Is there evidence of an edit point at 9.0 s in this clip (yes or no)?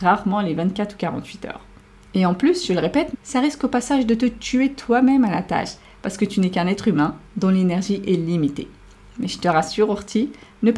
no